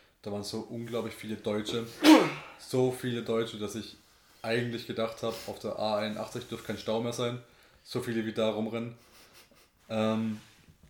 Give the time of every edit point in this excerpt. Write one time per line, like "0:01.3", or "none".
0:09.8